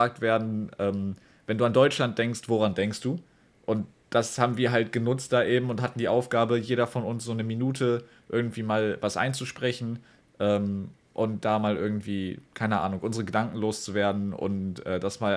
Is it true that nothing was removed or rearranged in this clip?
yes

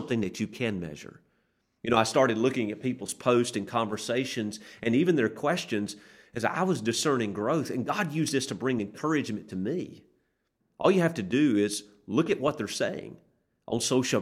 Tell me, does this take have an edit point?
yes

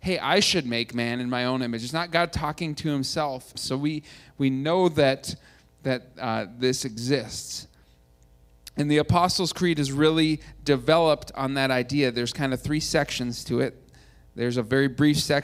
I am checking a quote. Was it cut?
yes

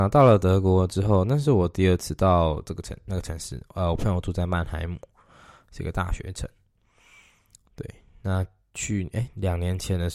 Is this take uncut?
yes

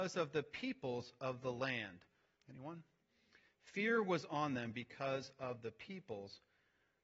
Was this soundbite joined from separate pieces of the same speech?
yes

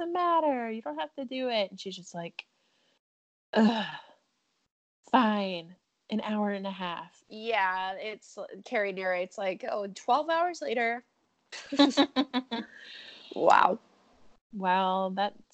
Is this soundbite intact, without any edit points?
no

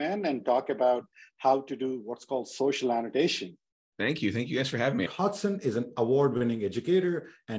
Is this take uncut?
no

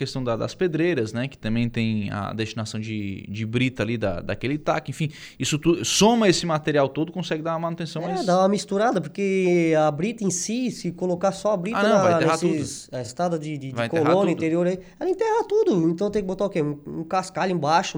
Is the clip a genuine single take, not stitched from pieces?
yes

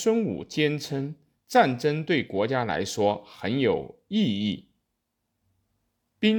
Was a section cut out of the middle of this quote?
no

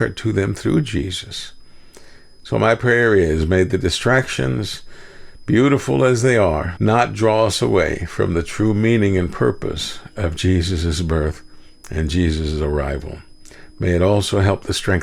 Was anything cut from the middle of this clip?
yes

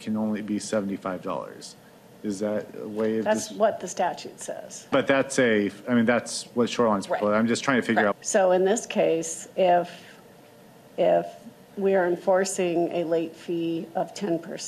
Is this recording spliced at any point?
yes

